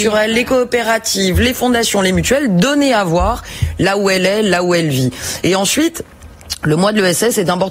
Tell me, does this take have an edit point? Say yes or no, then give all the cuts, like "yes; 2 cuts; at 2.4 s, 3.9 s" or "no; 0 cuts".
no; 0 cuts